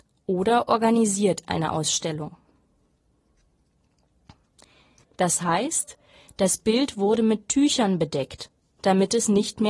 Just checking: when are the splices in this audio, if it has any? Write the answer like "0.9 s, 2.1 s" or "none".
5.0 s

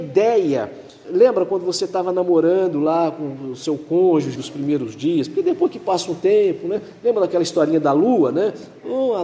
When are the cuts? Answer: 1.0 s, 4.3 s

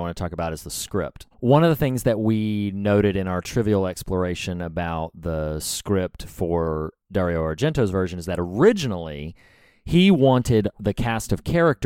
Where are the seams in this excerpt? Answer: 1.3 s

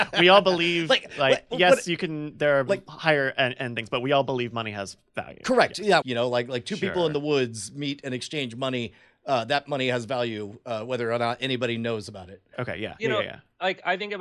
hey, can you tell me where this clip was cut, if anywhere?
6.0 s

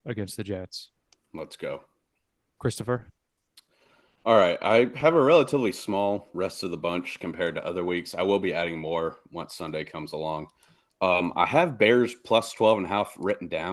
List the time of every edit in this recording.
none

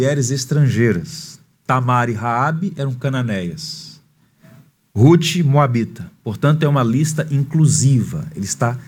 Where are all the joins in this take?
none

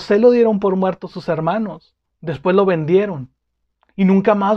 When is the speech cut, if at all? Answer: 2.1 s

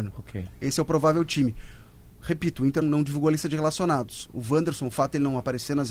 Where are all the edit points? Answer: 2.8 s

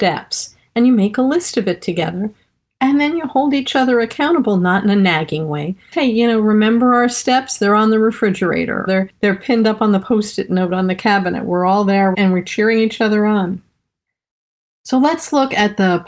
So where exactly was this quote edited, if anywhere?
5.9 s, 8.9 s, 12.1 s

